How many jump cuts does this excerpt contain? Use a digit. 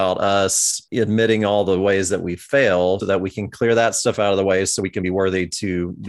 1